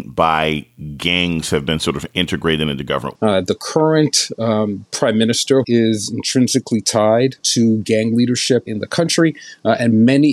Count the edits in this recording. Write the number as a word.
two